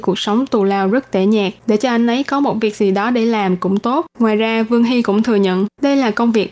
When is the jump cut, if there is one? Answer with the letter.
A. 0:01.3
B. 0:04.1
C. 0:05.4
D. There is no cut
B